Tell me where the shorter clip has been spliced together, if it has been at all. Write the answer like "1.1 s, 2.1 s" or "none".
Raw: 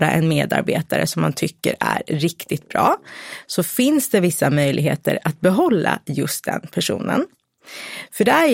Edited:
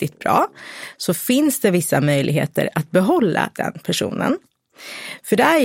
3.5 s